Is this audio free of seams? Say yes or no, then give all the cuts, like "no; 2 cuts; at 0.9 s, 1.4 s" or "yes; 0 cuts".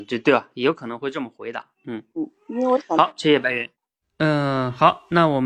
no; 2 cuts; at 1.8 s, 4.0 s